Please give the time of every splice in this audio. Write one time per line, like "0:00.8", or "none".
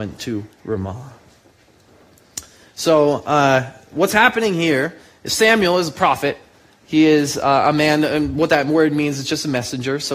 none